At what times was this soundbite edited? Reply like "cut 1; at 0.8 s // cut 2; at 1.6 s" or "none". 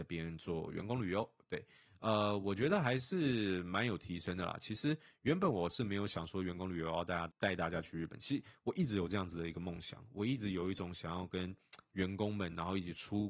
cut 1; at 7.3 s